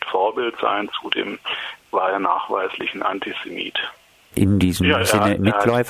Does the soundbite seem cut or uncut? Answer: uncut